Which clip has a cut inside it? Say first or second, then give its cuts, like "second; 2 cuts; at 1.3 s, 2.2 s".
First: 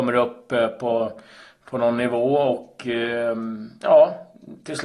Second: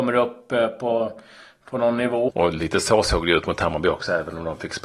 second; 1 cut; at 2.3 s